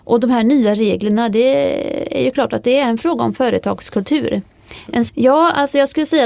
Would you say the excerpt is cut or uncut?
cut